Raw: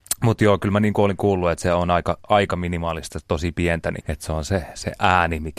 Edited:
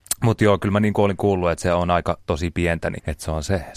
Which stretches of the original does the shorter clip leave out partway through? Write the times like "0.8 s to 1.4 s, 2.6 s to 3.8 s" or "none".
2.2 s to 3.2 s